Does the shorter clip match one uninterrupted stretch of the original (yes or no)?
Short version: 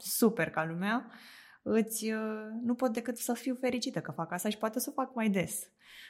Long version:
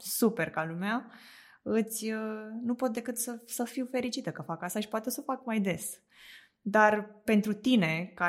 no